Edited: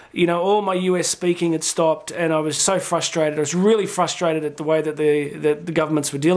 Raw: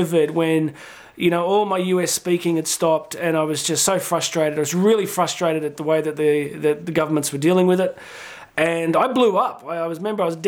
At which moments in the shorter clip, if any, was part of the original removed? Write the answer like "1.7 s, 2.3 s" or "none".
2.6 s